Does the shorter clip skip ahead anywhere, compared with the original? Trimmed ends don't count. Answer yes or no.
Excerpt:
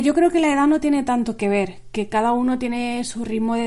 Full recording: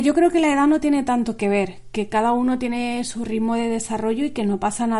no